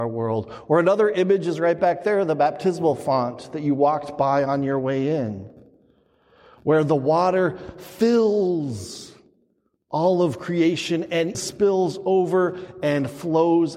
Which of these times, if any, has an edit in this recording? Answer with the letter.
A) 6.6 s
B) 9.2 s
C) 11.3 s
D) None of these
C